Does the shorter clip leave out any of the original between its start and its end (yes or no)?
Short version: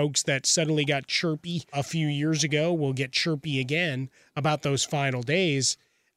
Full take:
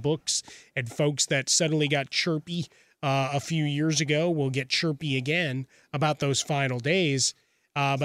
yes